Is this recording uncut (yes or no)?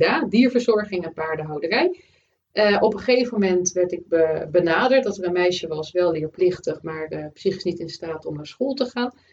yes